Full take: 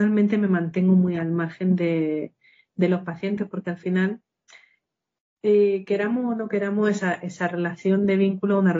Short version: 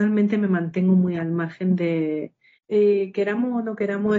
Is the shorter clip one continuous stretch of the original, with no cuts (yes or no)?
no